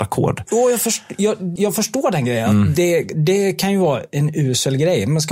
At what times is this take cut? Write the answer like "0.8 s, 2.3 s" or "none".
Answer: 1.6 s